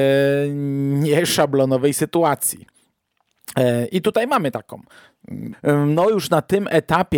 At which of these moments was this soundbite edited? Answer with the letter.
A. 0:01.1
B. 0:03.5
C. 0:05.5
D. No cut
C